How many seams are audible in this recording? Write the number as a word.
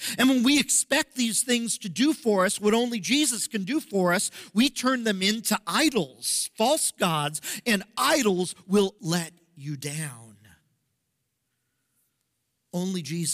one